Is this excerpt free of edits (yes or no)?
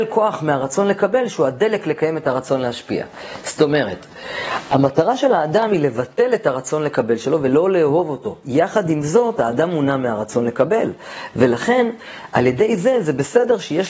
yes